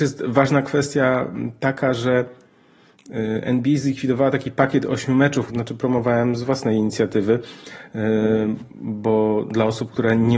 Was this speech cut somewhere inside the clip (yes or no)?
yes